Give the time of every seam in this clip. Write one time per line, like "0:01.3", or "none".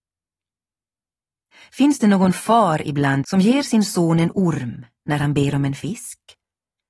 0:03.2